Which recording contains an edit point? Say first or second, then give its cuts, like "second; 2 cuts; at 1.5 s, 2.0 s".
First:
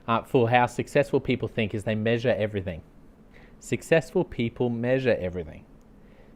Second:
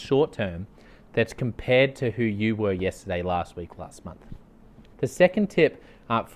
second; 1 cut; at 4.9 s